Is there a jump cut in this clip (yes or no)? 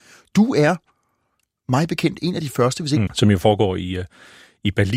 yes